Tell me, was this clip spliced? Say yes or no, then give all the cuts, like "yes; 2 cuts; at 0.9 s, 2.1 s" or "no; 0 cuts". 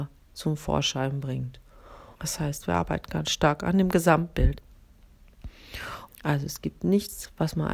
yes; 2 cuts; at 2.1 s, 6.1 s